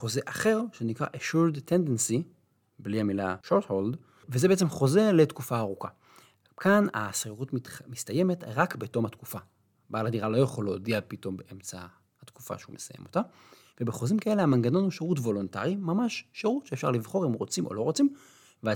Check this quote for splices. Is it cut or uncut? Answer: uncut